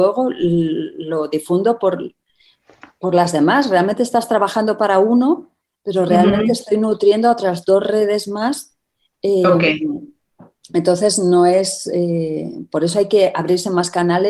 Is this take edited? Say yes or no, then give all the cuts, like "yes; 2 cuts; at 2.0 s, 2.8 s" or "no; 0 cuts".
no; 0 cuts